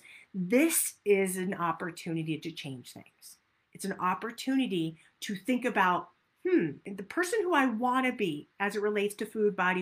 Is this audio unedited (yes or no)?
yes